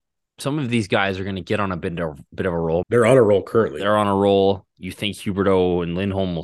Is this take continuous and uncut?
no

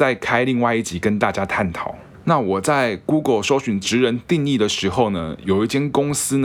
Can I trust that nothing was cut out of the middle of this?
no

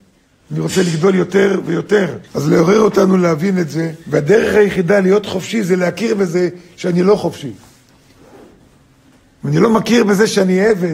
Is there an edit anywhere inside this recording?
yes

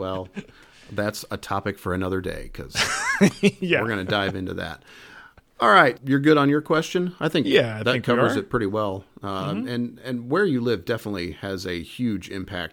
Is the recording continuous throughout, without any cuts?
no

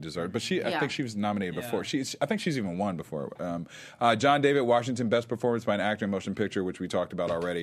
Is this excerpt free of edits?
yes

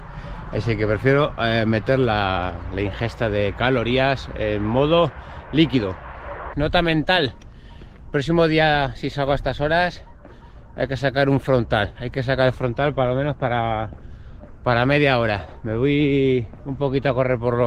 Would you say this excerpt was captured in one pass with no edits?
no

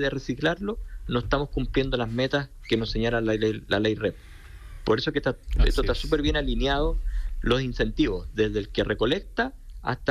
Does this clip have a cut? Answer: no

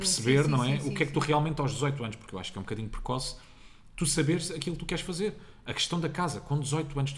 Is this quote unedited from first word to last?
yes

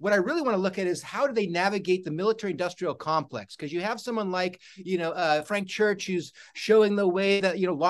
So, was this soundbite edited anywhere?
no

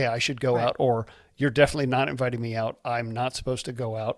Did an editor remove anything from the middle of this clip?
no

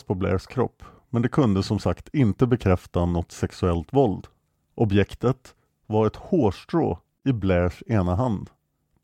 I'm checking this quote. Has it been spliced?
no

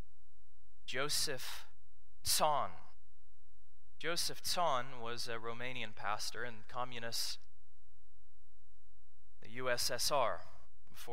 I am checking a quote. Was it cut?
no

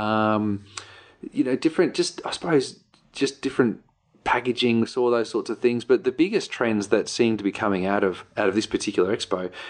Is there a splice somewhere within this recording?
no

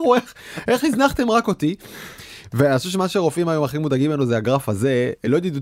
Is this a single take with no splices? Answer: yes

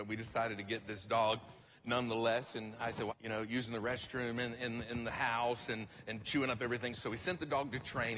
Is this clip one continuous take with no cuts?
no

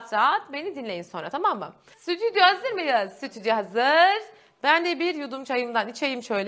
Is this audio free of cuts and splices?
no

